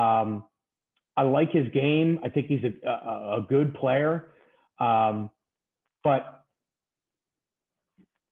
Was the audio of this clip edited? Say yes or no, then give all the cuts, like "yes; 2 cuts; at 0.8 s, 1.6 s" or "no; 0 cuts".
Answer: no; 0 cuts